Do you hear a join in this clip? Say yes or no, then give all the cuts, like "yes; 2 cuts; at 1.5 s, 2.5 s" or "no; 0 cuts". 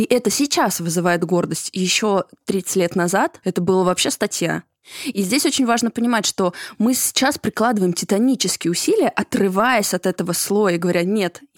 no; 0 cuts